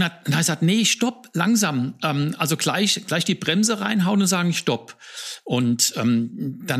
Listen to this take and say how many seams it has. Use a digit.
1